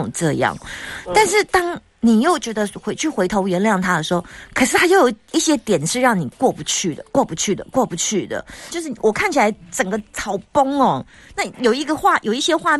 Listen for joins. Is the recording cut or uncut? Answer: cut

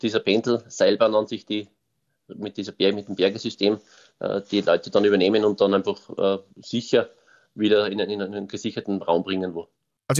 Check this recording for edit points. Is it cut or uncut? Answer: cut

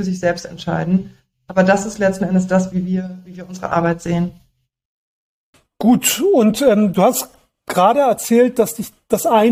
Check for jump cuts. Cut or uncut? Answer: uncut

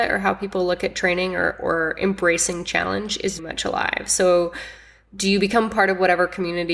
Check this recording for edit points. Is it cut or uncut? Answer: cut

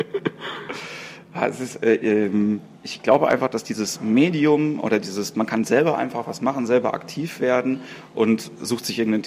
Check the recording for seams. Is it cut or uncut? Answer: uncut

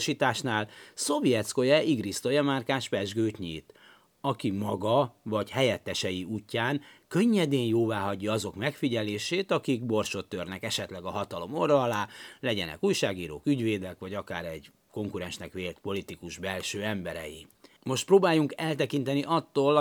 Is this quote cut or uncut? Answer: cut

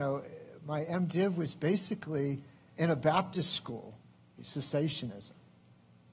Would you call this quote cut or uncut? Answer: cut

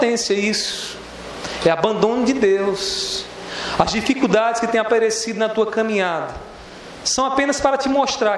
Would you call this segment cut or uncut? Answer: uncut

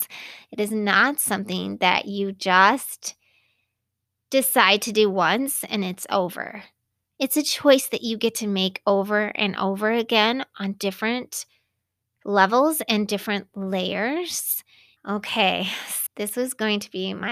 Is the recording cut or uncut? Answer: cut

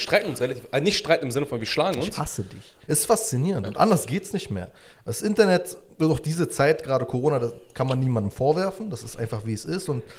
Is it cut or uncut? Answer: cut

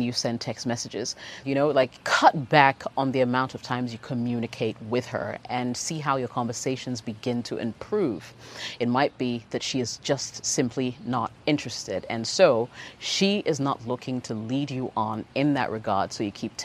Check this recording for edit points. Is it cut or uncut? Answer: cut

